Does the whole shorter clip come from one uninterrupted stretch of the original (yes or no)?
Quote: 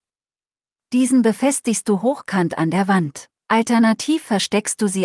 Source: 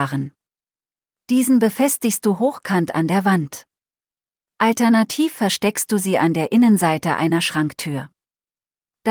no